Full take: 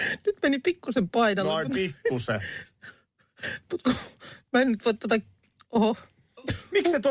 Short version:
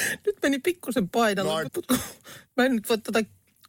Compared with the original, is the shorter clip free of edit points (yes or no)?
no